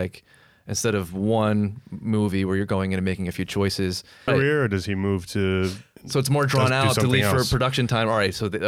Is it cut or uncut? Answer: cut